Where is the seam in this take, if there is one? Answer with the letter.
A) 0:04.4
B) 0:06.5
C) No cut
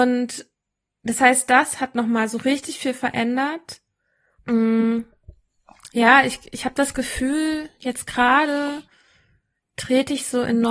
A